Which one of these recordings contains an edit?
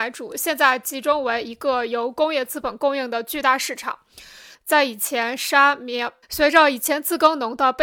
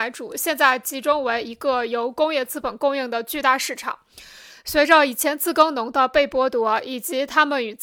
first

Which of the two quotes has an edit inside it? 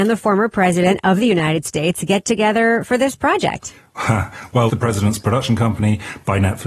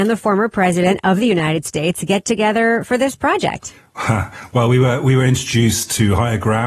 first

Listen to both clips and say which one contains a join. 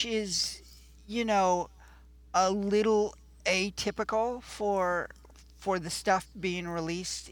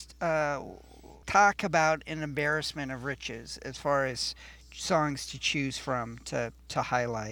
second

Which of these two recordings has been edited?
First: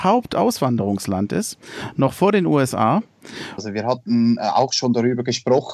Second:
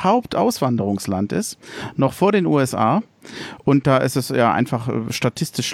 first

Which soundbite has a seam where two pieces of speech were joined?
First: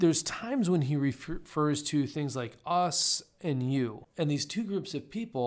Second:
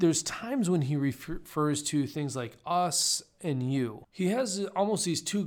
first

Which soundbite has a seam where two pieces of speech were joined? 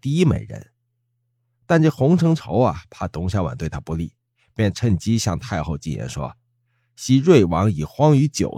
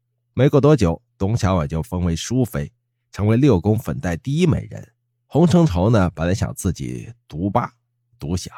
second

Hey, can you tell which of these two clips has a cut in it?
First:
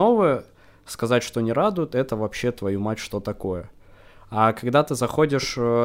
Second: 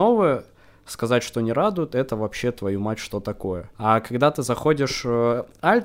second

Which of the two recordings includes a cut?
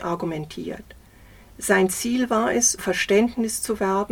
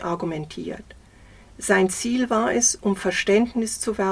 first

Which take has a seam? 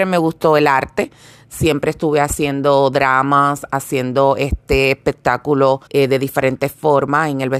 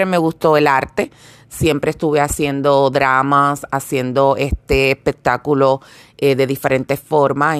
first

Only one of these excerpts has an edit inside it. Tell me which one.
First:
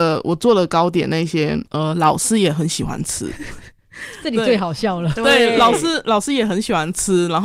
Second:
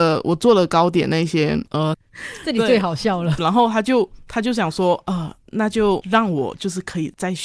second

